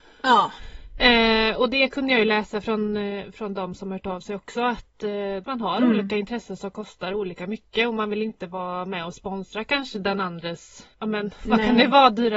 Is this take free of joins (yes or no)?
yes